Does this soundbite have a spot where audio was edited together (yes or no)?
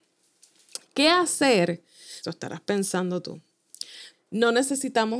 yes